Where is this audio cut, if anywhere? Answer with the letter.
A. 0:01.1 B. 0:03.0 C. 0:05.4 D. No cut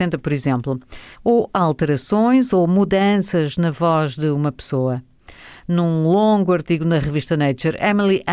A